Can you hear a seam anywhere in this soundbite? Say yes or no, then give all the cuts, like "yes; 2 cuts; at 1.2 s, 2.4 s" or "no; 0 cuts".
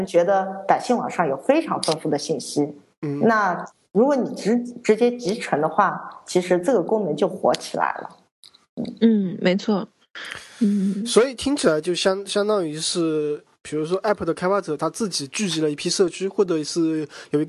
no; 0 cuts